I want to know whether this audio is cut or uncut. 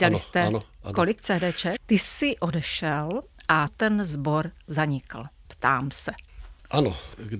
cut